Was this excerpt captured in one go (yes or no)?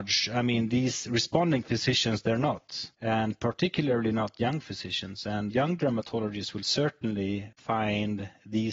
yes